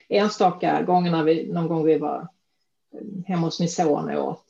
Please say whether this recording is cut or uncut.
uncut